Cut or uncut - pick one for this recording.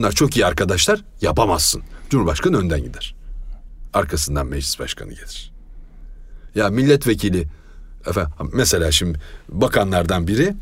uncut